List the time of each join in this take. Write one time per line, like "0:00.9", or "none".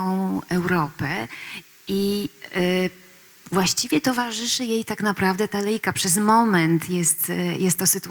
none